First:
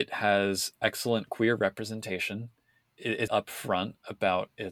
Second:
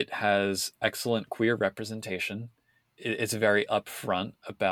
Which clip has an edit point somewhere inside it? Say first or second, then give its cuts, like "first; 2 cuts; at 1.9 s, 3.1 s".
first; 1 cut; at 3.3 s